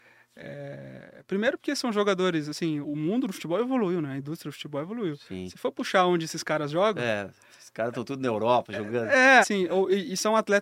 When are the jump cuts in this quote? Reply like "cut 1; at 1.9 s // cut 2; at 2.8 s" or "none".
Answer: cut 1; at 2.8 s // cut 2; at 9.4 s